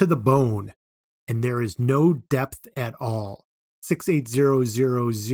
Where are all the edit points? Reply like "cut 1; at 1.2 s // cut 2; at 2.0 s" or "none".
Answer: none